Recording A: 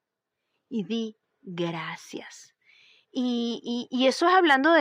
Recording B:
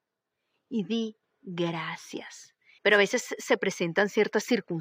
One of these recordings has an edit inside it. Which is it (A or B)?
B